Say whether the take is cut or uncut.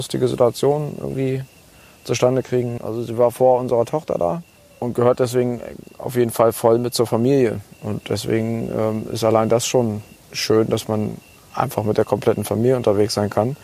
cut